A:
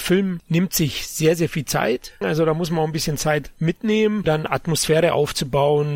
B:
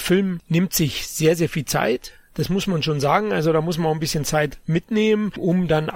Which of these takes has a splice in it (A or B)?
A